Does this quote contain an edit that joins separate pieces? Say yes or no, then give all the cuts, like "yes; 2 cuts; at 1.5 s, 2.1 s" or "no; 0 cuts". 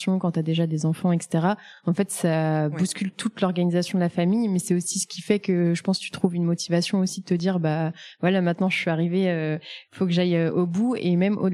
no; 0 cuts